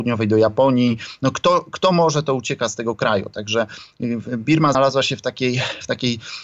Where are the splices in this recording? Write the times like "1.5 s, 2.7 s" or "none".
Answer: 4.7 s